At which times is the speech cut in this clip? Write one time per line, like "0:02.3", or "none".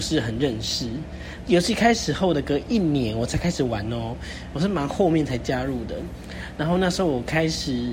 0:01.4